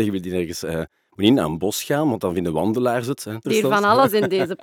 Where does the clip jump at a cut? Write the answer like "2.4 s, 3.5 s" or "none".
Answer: 3.4 s